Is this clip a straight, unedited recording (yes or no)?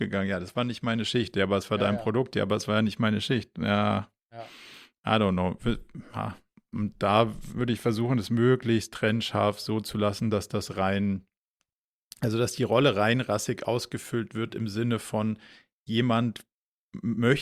no